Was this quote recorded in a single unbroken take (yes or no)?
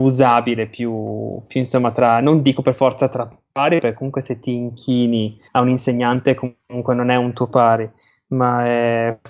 no